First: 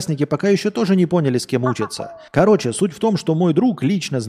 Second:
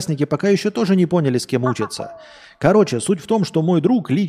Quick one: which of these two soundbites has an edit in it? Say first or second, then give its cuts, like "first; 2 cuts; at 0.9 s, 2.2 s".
first; 1 cut; at 2.3 s